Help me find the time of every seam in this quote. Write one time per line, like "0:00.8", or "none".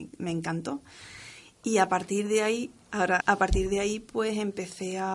0:03.2